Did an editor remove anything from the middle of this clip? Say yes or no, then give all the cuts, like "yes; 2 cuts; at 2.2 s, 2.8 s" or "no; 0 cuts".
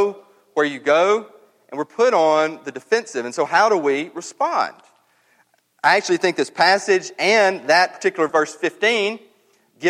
yes; 1 cut; at 8.3 s